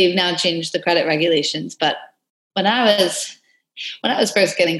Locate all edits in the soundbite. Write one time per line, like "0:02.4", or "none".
none